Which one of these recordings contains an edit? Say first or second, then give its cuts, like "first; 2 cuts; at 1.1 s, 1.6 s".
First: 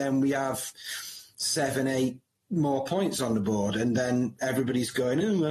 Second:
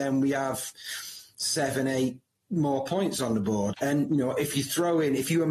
second; 1 cut; at 3.7 s